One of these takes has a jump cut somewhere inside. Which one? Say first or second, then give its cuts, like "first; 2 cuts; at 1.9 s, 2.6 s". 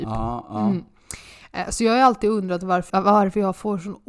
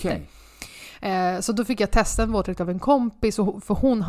first; 1 cut; at 2.9 s